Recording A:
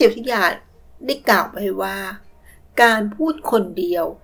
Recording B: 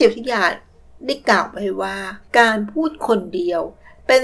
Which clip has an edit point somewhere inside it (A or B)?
B